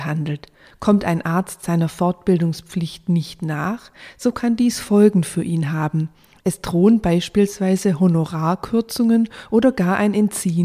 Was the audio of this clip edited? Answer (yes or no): no